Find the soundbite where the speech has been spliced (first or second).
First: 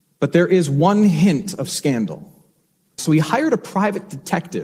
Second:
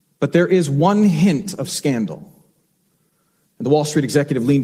first